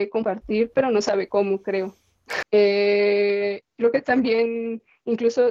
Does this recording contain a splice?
yes; 1 cut; at 2.4 s

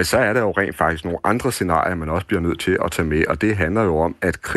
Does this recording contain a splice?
no; 0 cuts

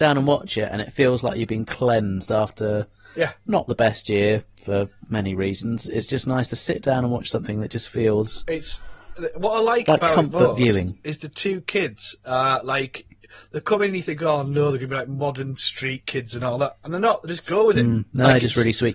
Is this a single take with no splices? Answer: yes; 0 cuts

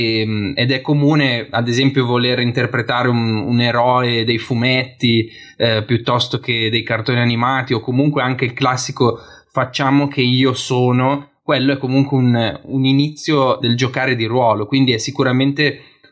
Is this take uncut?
no; 1 cut; at 13.6 s

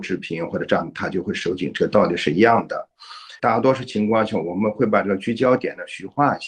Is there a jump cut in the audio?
yes; 1 cut; at 3.4 s

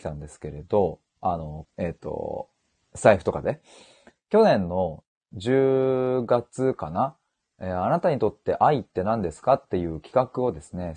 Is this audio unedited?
no; 1 cut; at 1.7 s

